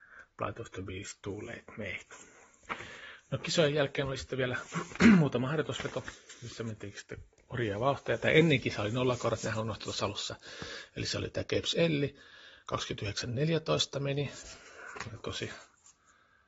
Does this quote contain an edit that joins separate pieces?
no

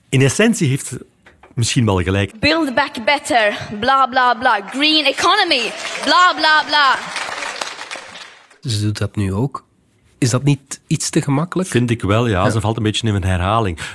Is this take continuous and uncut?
no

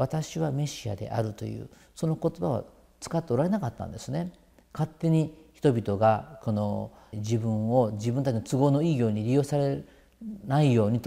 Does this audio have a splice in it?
yes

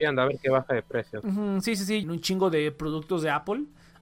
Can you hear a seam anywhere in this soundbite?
yes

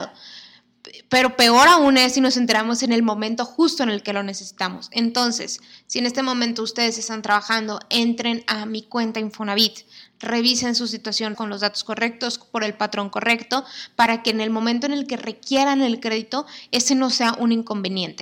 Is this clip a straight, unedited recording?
no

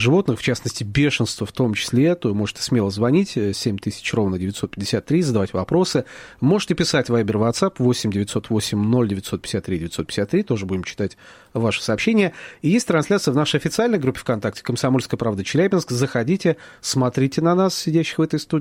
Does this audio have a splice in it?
no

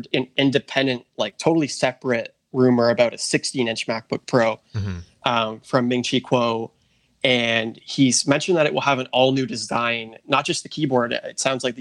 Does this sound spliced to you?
no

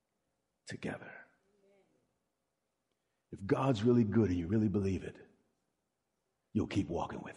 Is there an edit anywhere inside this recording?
no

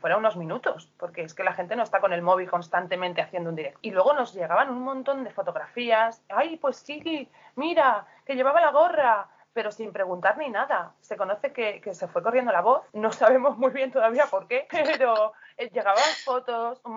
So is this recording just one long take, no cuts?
yes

